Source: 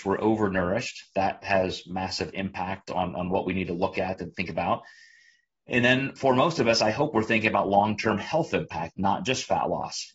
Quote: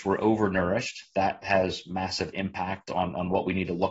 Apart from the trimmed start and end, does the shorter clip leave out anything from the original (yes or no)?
no